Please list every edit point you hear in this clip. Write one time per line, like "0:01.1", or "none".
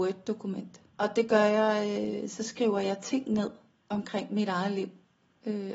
0:00.9